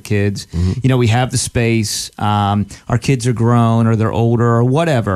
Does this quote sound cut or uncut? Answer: uncut